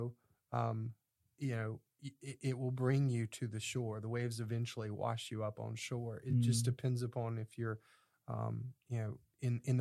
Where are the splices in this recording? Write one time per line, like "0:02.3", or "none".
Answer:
none

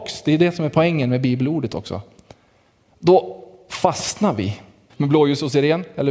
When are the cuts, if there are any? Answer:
0:04.9

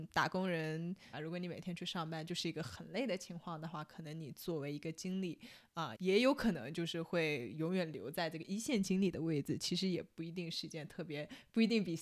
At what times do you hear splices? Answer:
0:01.1
0:05.9

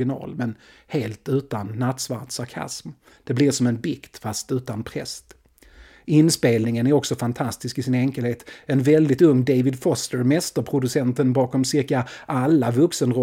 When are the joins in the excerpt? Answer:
none

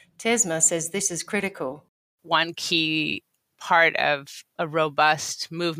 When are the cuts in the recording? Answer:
none

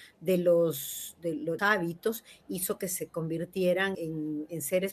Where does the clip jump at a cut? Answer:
0:01.6
0:03.9

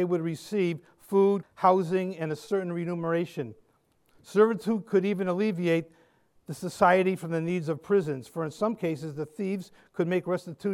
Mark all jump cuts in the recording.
0:01.4

